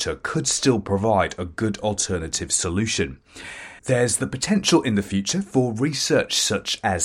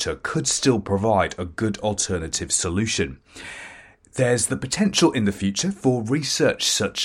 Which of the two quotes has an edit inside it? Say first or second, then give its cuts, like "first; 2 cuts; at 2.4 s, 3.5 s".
first; 1 cut; at 3.8 s